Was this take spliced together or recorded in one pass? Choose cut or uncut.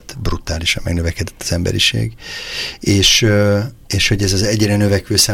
cut